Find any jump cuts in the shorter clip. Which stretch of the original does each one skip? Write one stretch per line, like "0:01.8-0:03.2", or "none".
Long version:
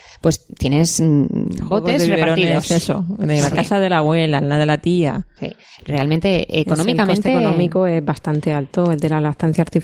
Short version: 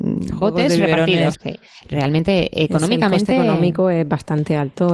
0:02.6-0:05.3